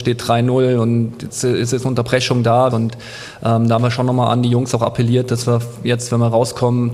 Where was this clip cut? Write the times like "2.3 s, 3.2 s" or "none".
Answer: 2.7 s